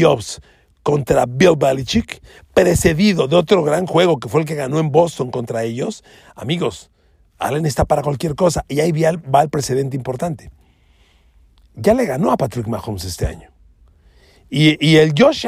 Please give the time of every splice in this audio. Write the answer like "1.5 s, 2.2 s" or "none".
none